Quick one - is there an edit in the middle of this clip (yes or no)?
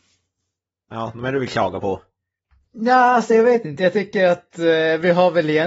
no